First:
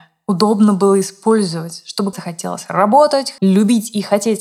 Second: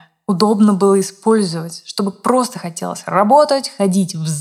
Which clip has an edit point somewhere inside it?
first; 2 cuts; at 2.1 s, 3.4 s

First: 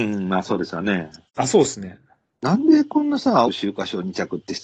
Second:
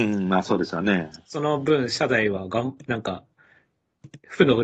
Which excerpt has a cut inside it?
first; 2 cuts; at 1.3 s, 3.4 s

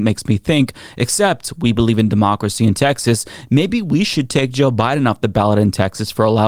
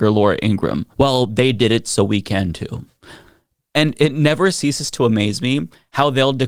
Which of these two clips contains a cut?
second; 1 cut; at 0.9 s

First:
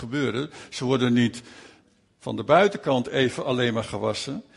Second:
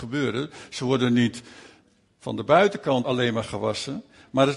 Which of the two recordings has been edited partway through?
second; 1 cut; at 3.0 s

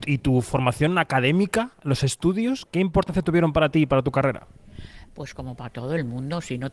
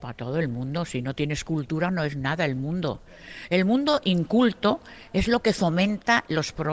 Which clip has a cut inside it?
first; 1 cut; at 2.7 s

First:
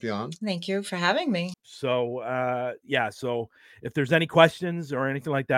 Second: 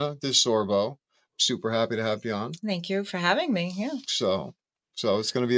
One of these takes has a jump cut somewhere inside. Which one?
first; 1 cut; at 1.5 s

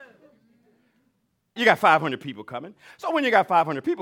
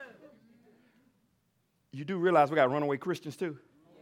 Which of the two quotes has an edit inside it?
first; 1 cut; at 1.6 s

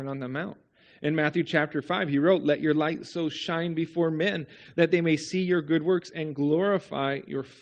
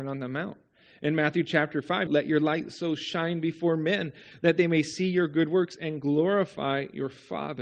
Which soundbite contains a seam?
second; 1 cut; at 2.1 s

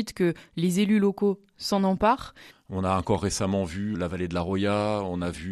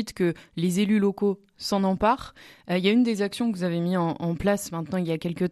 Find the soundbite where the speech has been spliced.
first; 2 cuts; at 2.5 s, 3.9 s

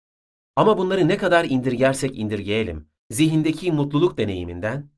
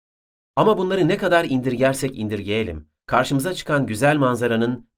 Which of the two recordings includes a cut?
first; 1 cut; at 3.0 s

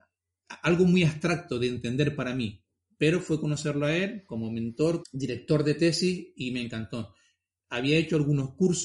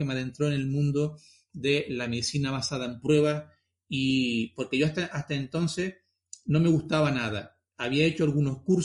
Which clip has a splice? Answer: first; 2 cuts; at 5.0 s, 7.6 s

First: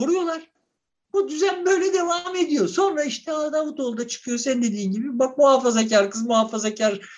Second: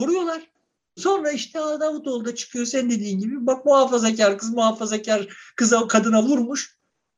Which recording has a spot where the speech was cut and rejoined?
second; 1 cut; at 1.0 s

